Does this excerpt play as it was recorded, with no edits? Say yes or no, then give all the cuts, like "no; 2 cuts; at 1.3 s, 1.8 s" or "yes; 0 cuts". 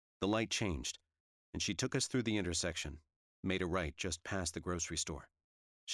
yes; 0 cuts